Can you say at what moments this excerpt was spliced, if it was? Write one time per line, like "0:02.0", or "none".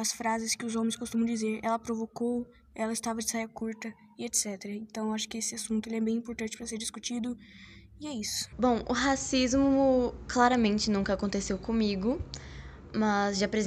0:08.5